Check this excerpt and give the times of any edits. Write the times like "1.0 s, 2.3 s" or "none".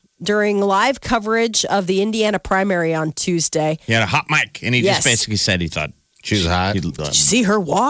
7.0 s